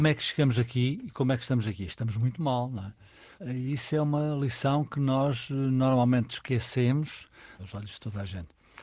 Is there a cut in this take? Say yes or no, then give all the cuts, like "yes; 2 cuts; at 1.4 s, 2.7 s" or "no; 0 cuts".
yes; 2 cuts; at 3.4 s, 7.6 s